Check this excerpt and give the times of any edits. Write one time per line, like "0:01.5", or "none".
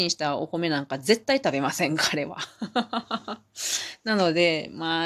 none